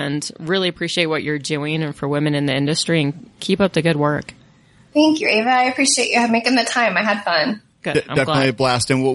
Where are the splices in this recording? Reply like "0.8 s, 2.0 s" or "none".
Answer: 7.7 s